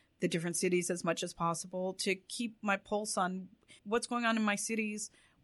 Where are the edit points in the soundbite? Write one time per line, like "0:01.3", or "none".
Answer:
0:03.8